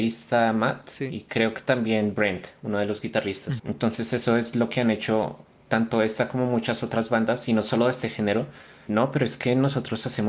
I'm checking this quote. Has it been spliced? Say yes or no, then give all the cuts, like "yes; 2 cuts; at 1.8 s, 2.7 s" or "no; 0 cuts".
yes; 2 cuts; at 3.6 s, 8.9 s